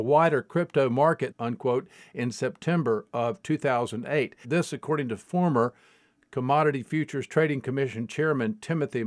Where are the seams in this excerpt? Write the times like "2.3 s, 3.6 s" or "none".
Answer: 1.3 s, 4.4 s